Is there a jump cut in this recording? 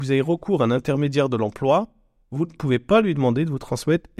no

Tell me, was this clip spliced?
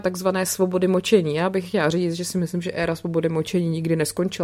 no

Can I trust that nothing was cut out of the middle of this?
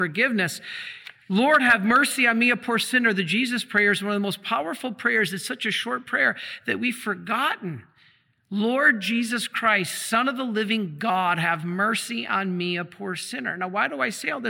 yes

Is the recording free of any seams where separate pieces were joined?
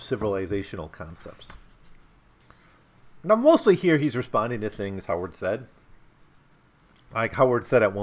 yes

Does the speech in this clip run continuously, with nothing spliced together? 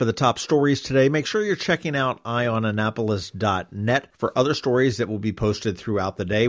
yes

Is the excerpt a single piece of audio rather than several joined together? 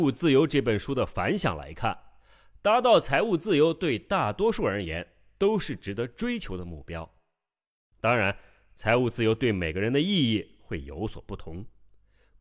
yes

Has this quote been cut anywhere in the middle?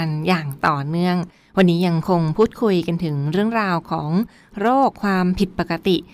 yes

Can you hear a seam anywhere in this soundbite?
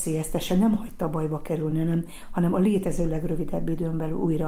no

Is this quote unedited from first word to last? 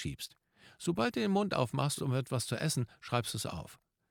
yes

